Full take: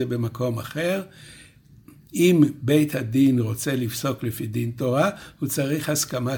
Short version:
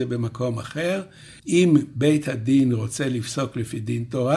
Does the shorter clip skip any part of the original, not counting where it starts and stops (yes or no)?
yes